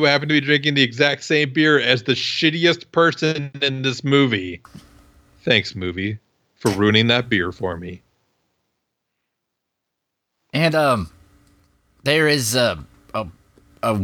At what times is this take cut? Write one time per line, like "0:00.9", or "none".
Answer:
none